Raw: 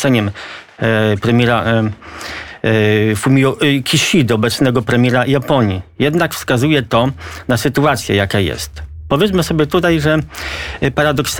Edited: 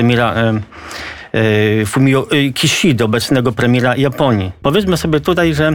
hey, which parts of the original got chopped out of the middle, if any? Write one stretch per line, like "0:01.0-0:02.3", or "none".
0:05.9-0:09.1